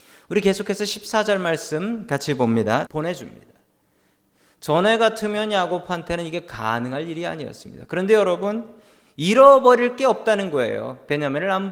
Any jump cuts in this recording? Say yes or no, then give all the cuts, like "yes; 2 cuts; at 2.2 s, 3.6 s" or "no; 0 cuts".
yes; 1 cut; at 2.9 s